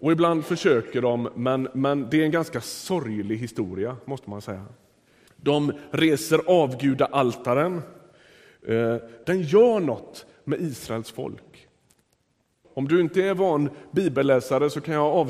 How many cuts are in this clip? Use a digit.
3